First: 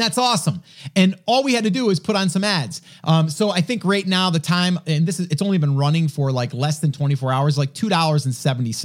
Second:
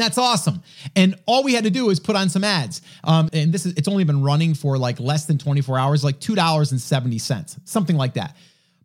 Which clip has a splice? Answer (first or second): second